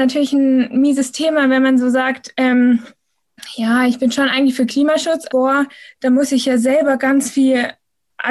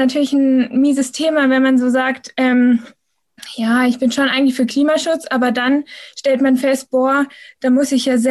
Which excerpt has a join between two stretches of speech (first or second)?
first